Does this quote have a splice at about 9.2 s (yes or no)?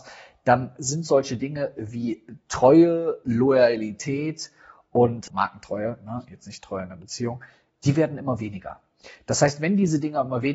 no